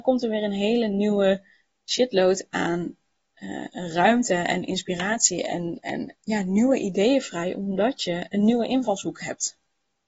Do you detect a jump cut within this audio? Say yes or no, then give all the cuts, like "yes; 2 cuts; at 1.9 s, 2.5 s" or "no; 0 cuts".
yes; 1 cut; at 6.2 s